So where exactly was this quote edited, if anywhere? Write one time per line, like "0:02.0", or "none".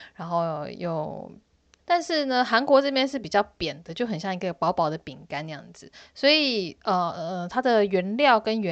0:01.8